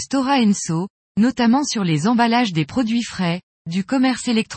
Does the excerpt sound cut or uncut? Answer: uncut